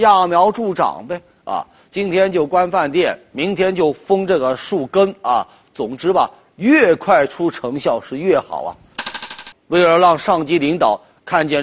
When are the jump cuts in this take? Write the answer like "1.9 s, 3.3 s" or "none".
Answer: 9.5 s